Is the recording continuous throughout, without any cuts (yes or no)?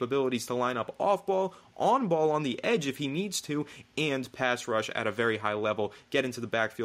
yes